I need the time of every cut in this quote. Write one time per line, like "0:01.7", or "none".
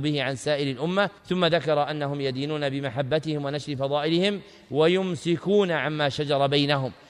0:01.2